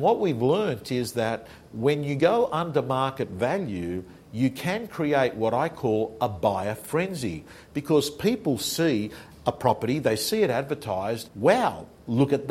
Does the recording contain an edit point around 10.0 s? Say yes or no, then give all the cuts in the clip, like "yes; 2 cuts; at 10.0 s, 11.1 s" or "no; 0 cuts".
no; 1 cut; at 11.3 s